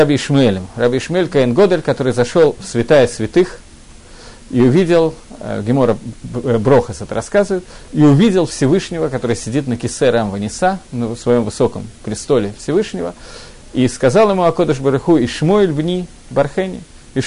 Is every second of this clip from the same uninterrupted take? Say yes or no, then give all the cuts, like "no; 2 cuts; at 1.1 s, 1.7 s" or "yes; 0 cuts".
yes; 0 cuts